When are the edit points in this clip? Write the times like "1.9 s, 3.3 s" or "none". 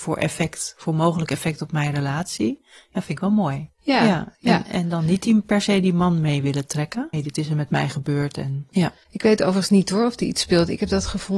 7.1 s, 8.7 s